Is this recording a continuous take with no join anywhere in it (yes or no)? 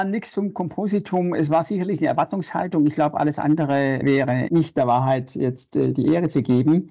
yes